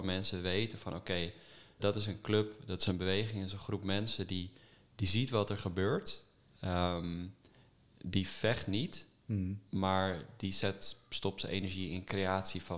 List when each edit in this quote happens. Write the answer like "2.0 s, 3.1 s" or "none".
1.8 s